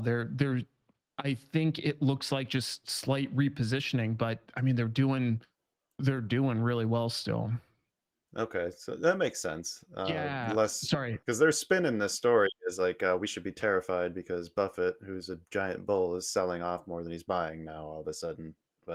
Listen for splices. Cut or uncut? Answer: uncut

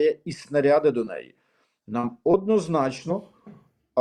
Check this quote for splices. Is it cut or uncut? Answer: uncut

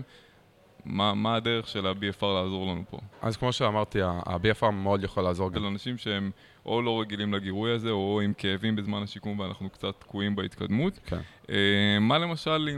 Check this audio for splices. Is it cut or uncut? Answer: cut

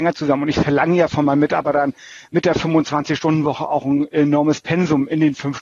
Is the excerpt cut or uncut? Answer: uncut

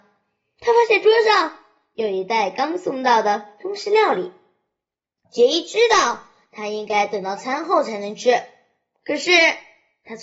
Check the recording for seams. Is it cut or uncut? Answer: cut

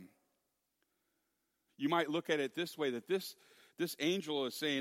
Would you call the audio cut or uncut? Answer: cut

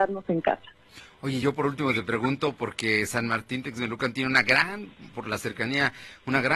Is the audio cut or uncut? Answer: uncut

